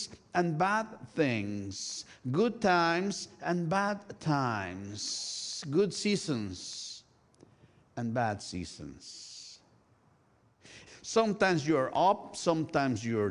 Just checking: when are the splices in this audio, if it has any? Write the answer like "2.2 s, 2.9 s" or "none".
10.9 s